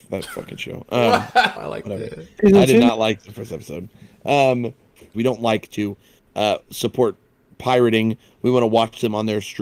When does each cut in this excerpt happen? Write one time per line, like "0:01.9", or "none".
0:01.5
0:05.1